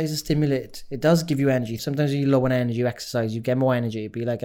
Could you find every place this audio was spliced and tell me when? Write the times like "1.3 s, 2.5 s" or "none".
1.8 s